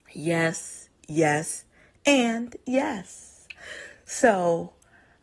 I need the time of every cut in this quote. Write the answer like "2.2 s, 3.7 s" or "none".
none